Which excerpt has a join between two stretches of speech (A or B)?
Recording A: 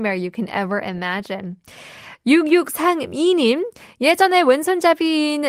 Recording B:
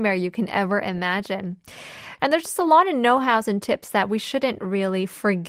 B